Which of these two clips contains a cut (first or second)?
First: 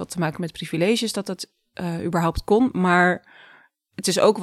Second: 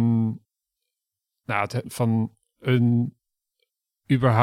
second